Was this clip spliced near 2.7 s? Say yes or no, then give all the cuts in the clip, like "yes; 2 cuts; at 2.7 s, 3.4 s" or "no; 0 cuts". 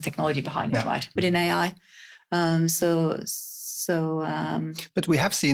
no; 1 cut; at 1.2 s